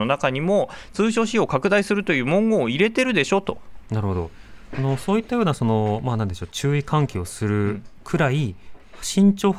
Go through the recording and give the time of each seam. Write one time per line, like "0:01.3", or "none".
0:03.9